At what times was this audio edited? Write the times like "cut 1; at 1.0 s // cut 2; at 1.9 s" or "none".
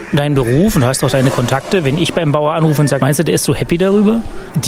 cut 1; at 3.0 s